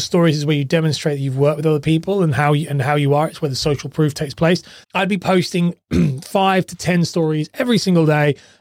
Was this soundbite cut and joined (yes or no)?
yes